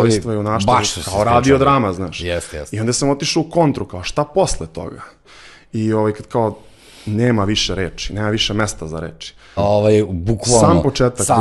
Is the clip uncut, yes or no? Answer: no